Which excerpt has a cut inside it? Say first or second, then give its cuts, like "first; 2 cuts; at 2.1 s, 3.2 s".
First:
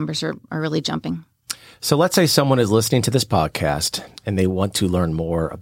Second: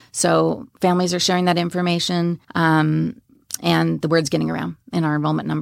second; 1 cut; at 2.4 s